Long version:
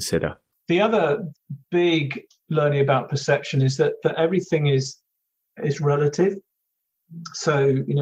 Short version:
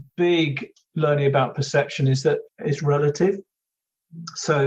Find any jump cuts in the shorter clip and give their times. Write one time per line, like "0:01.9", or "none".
0:02.4